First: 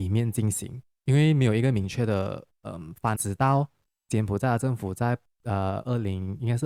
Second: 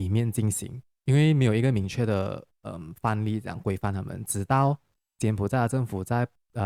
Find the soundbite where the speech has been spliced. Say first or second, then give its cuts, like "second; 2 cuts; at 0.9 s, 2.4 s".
first; 1 cut; at 3.2 s